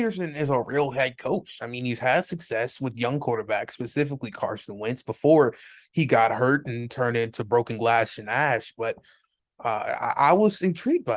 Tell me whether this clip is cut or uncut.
uncut